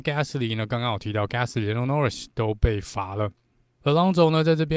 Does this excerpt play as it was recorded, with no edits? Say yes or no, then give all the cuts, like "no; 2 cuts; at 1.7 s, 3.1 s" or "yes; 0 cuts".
no; 1 cut; at 3.8 s